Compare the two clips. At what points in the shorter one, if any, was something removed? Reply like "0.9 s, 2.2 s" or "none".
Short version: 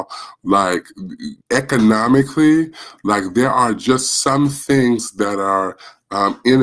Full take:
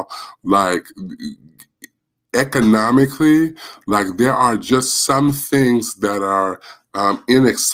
1.4 s